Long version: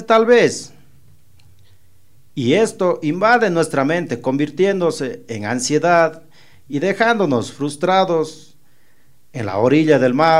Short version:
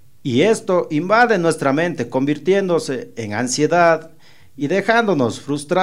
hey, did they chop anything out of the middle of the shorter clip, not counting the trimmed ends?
no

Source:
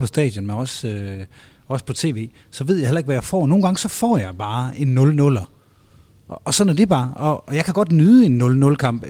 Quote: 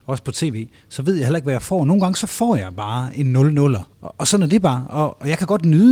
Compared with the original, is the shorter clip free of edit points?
no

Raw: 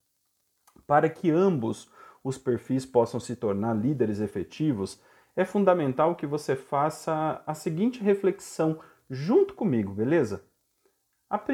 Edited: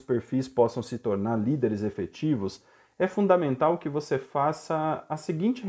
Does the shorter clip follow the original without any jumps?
yes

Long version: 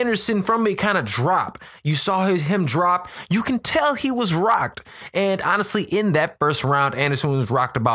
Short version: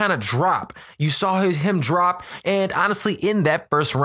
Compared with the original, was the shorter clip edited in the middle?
yes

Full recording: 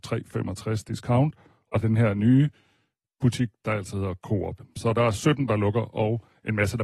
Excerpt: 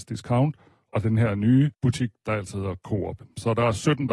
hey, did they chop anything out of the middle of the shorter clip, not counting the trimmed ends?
yes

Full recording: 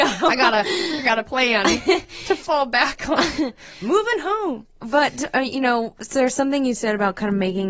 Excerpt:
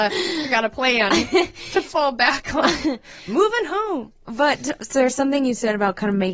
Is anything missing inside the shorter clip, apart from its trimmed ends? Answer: yes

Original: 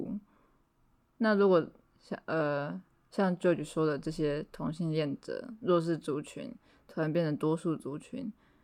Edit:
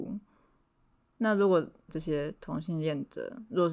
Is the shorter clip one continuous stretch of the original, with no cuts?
no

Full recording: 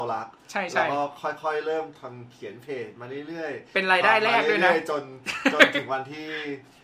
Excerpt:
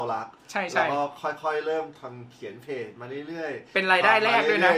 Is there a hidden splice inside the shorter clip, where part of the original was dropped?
no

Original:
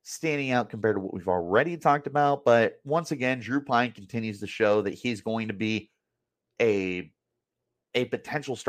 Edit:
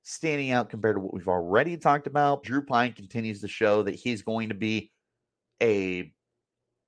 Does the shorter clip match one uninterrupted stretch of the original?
no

